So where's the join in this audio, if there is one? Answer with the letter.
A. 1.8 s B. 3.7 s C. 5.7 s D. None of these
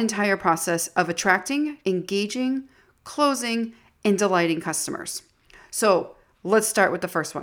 A